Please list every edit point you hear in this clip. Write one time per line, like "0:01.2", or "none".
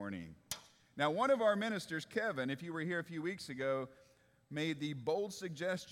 none

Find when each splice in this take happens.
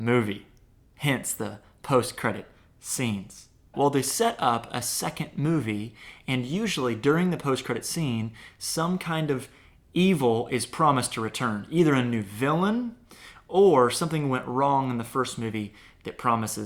0:03.7

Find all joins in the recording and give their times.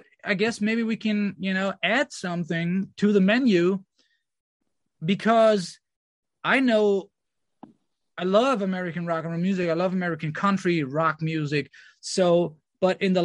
none

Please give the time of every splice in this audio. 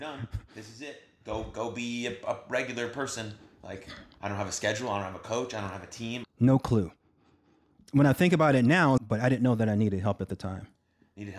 0:06.2
0:09.0

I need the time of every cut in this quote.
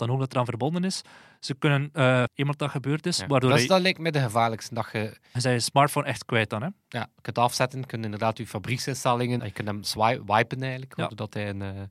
0:02.3
0:09.4

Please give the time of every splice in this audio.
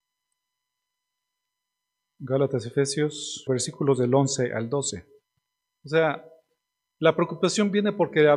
0:03.5
0:05.7

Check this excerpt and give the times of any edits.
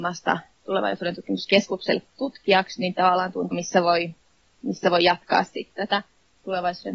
0:03.5

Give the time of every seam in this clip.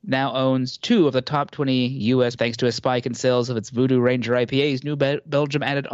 0:02.4

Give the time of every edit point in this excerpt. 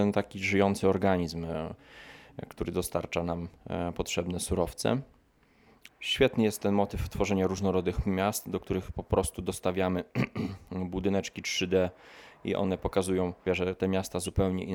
0:05.9
0:13.5

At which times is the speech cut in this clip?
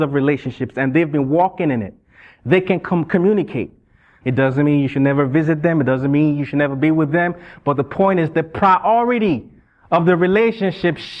0:04.2

